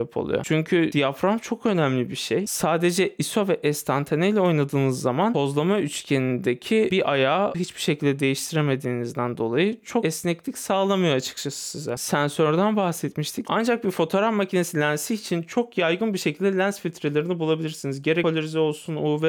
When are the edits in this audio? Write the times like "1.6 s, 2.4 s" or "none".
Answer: 13.4 s